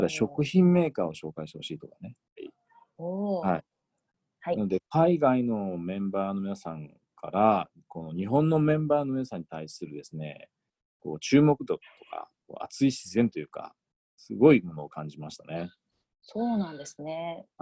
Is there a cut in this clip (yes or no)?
yes